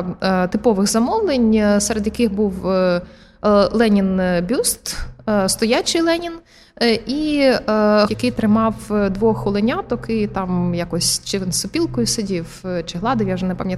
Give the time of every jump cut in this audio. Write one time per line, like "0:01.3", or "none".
0:08.1

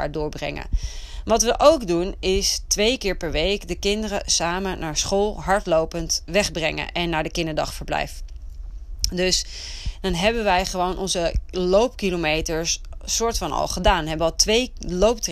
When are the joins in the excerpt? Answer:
none

